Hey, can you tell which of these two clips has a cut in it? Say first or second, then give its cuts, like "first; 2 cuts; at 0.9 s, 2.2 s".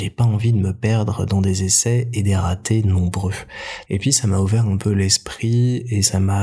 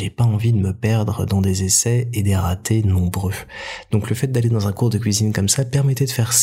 first; 1 cut; at 3.9 s